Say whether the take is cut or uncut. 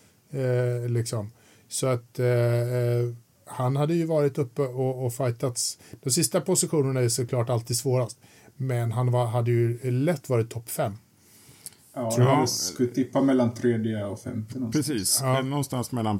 uncut